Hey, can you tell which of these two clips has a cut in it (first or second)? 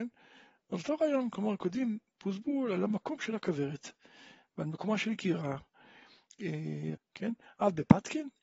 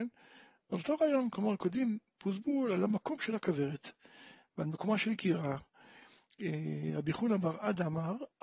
first